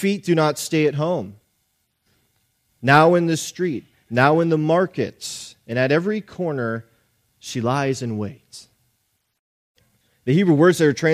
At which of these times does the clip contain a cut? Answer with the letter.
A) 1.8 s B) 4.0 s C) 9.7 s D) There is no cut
D